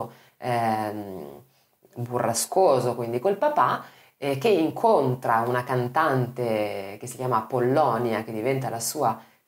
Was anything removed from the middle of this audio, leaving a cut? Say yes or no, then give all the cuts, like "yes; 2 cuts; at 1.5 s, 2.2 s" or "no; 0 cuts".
no; 0 cuts